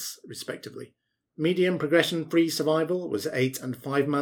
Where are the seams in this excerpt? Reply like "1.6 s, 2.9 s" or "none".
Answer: 1.3 s